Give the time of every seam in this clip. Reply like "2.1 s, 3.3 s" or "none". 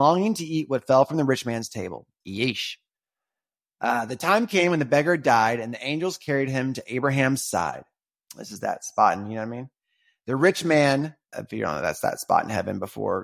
2.2 s, 11.3 s